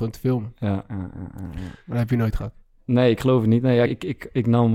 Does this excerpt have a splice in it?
yes; 2 cuts; at 1.8 s, 3.8 s

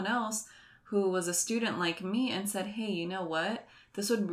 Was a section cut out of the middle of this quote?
no; 0 cuts

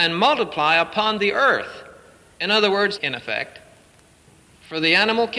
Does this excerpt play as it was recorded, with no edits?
no; 1 cut; at 3.0 s

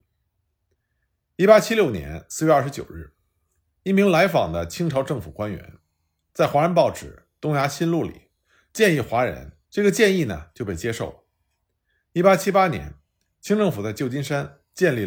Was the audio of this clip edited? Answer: yes; 1 cut; at 9.6 s

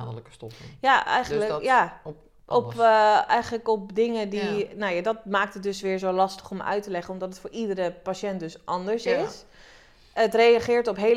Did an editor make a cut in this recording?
no; 0 cuts

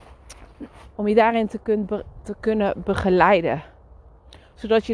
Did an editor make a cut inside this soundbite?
yes; 1 cut; at 1.0 s

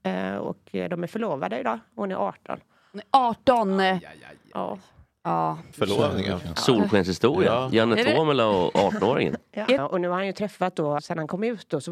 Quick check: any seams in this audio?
yes; 3 cuts; at 5.7 s, 9.8 s, 11.0 s

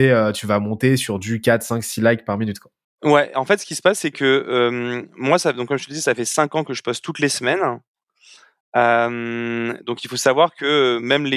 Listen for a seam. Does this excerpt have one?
no; 0 cuts

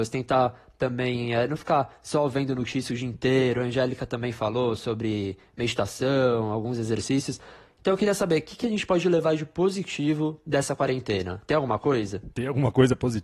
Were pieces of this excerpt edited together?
no; 0 cuts

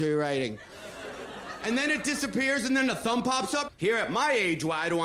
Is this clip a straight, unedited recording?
no; 2 cuts; at 1.6 s, 3.7 s

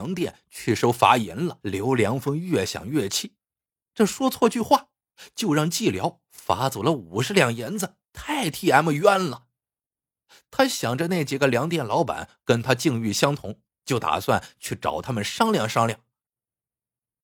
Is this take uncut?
no; 2 cuts; at 1.6 s, 8.0 s

